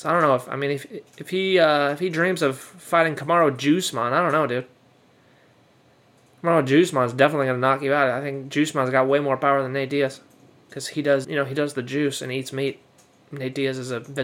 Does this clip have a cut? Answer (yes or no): yes